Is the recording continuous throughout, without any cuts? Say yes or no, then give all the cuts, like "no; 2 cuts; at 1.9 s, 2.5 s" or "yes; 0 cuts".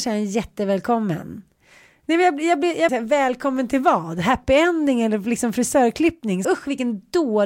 no; 2 cuts; at 2.9 s, 6.4 s